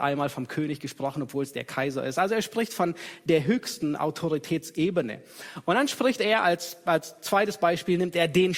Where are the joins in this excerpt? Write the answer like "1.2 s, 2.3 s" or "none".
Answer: none